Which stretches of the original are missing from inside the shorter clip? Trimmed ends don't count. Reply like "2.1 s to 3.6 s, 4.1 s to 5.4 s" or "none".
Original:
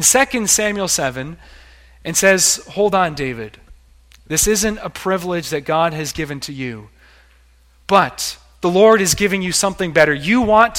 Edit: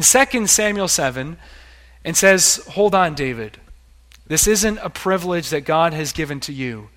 none